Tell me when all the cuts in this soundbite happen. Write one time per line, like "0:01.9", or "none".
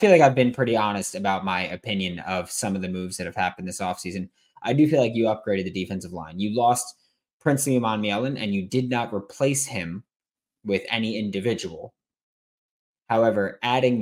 none

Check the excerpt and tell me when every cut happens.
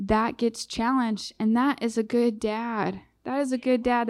none

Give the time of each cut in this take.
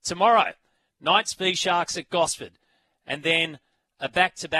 none

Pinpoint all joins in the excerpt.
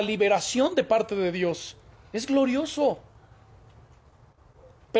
none

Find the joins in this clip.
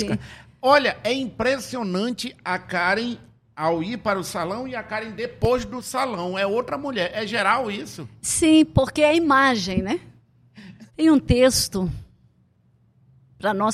0:10.9

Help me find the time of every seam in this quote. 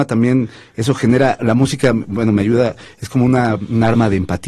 0:01.4

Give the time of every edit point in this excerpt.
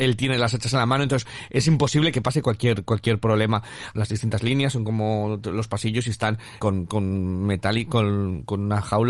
0:03.9
0:06.6

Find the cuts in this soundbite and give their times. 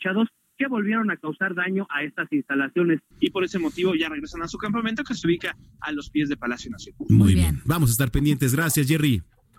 0:03.1

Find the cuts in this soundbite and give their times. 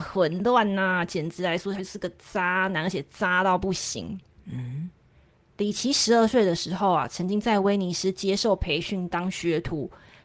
none

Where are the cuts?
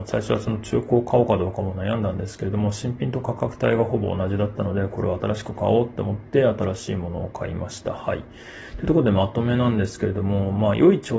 none

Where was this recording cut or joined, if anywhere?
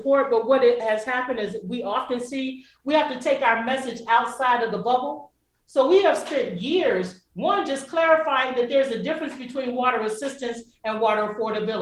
none

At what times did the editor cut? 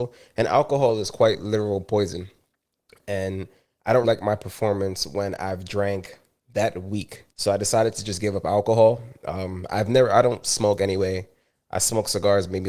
0:04.0
0:07.3

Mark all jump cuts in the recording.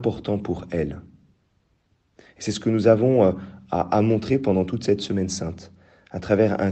none

